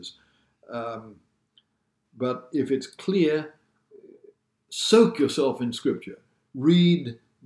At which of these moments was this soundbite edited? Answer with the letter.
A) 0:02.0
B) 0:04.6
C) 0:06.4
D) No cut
A